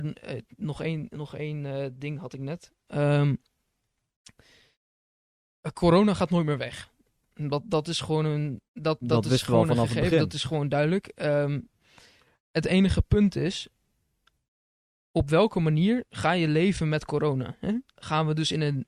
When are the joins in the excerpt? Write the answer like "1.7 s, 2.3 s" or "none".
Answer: 8.6 s